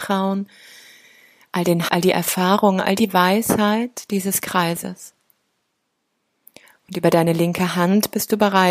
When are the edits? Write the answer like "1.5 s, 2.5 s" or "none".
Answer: 1.9 s